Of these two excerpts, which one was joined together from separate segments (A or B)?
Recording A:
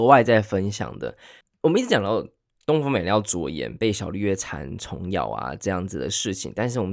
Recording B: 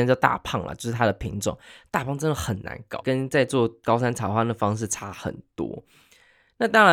B